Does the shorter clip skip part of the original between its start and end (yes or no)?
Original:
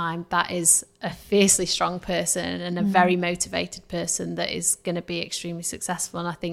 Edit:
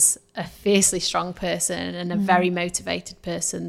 no